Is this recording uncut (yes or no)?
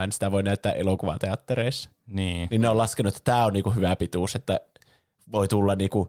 yes